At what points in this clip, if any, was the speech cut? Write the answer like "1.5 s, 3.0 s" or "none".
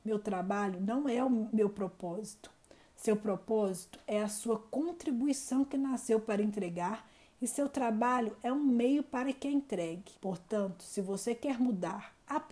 10.2 s